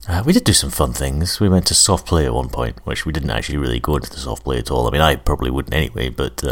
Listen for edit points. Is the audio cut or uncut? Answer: uncut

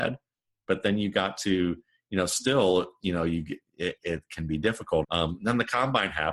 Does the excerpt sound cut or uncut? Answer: cut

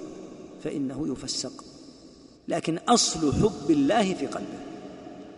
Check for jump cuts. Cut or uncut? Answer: cut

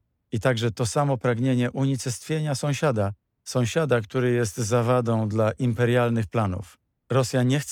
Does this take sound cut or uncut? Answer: uncut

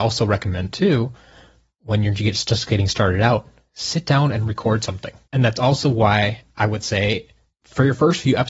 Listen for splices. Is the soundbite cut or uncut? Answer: cut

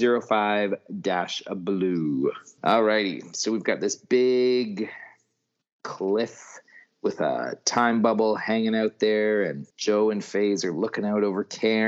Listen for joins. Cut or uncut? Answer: cut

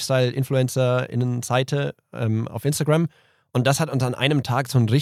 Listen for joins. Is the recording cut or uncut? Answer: uncut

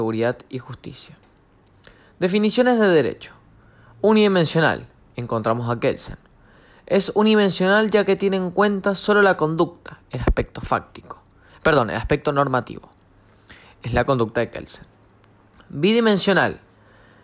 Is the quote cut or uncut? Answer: uncut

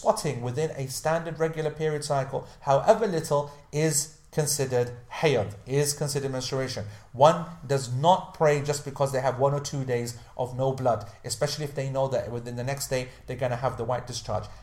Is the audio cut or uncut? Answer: uncut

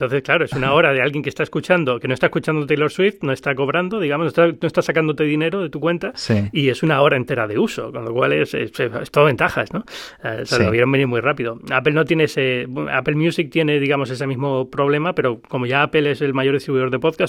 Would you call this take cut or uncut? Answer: uncut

